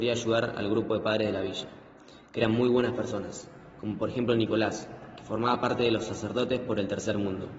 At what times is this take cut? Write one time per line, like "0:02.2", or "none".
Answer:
none